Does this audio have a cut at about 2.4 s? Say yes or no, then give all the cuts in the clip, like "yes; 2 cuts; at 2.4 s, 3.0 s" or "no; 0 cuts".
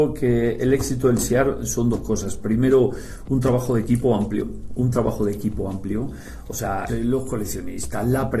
no; 1 cut; at 6.9 s